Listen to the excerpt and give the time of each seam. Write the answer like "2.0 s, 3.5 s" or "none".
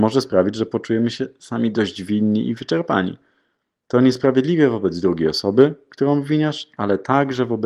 none